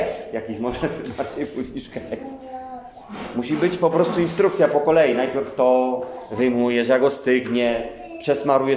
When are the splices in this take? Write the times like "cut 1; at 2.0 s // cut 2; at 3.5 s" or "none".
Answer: none